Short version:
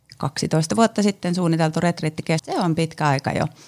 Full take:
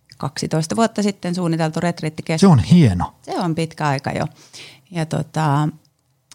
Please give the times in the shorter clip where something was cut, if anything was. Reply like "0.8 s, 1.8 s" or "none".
2.4 s